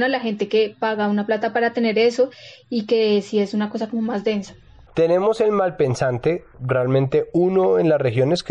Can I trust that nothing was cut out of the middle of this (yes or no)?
no